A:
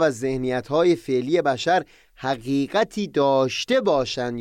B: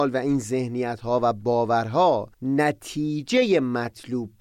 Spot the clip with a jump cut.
B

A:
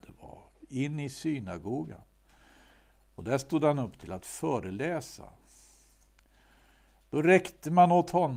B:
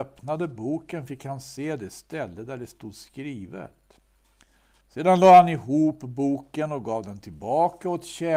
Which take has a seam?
B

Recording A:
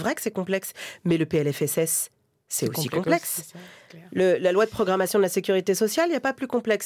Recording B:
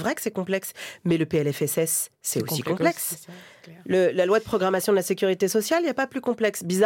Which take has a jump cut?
B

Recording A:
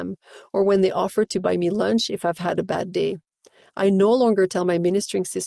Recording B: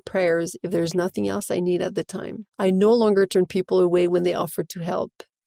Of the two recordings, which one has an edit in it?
B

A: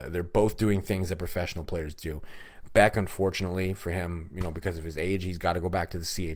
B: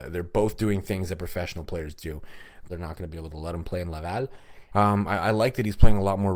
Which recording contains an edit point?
B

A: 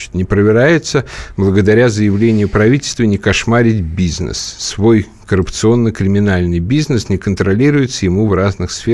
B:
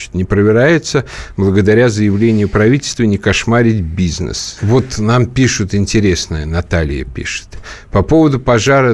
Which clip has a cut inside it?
B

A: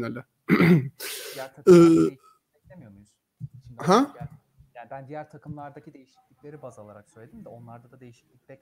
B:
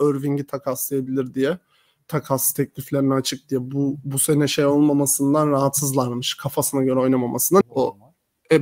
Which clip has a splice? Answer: B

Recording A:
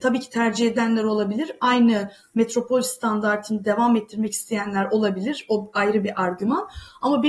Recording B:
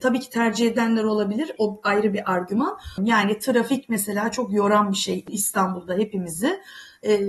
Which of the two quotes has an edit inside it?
B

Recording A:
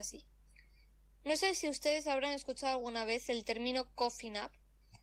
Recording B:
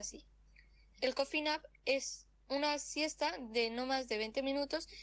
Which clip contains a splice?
B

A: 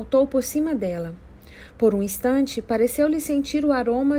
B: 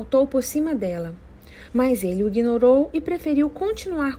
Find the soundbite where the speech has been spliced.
B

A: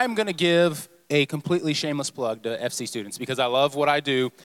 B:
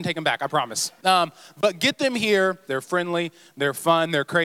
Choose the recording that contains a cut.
B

